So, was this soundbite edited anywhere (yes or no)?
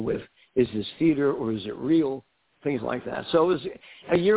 no